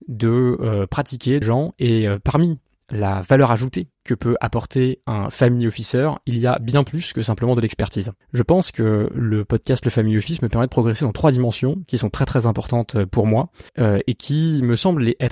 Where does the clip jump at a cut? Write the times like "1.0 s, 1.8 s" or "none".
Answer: 1.4 s, 8.2 s, 13.7 s